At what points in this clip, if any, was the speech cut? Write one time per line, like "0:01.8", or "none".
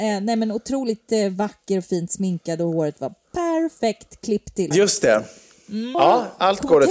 0:04.7
0:05.9